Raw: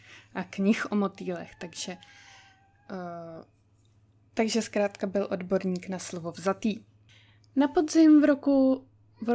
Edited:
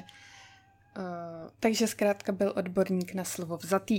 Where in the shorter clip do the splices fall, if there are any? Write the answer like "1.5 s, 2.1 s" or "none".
1.5 s